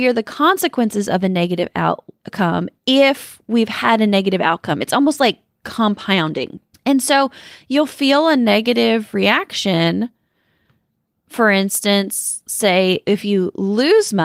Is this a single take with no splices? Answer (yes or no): no